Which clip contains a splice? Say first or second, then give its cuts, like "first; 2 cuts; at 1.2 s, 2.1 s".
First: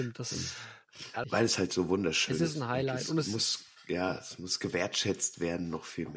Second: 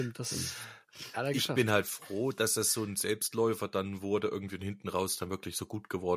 first; 1 cut; at 1.2 s